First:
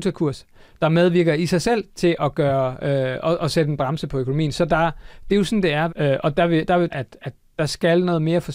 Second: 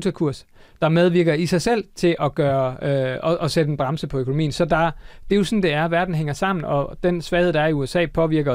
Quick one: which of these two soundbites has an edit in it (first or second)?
first